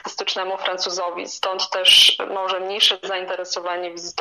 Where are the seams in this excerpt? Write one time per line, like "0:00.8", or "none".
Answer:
none